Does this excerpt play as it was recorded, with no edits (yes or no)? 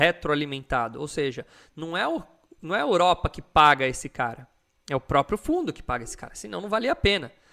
yes